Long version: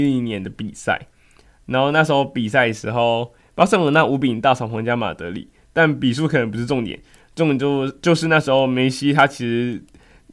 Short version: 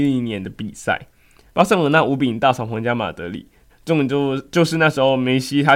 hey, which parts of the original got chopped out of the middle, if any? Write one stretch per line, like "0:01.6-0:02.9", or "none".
0:01.5-0:03.5
0:05.7-0:07.2